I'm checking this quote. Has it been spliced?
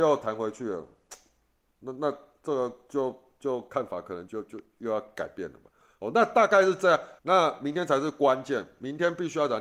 yes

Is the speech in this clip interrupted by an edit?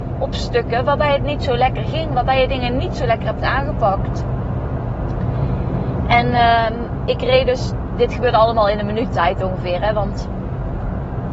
no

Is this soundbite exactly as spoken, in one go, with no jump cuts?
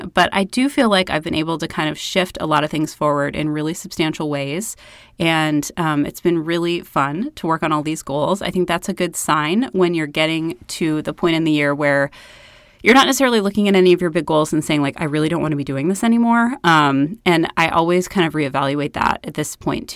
yes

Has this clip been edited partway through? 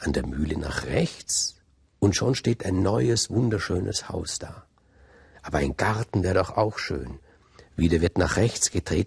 no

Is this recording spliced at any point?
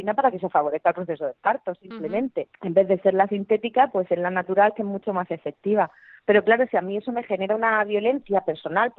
no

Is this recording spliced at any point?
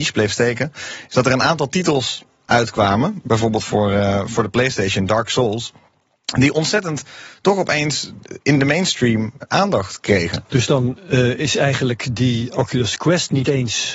no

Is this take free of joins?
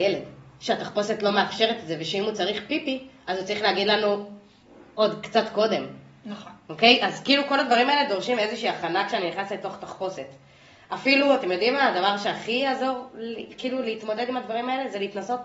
yes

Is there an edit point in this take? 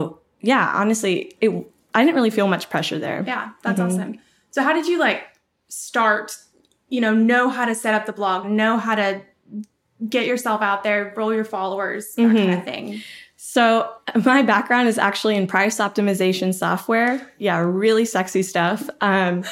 no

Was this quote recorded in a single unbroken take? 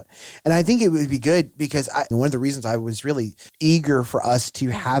no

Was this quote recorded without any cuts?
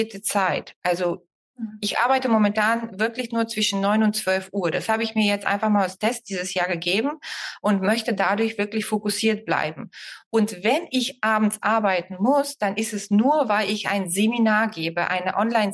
yes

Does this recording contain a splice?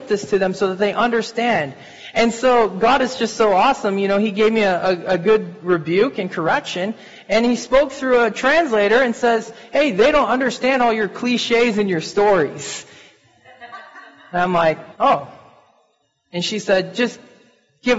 yes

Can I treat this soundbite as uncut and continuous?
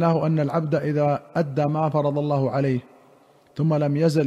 yes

